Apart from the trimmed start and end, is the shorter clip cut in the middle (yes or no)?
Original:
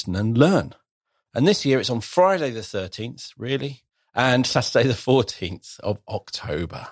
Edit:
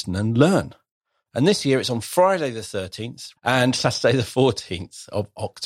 yes